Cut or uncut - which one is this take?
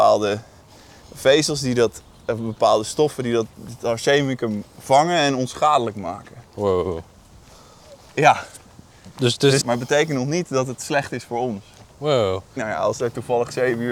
cut